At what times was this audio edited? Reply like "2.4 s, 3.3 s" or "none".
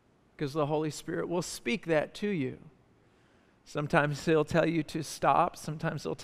none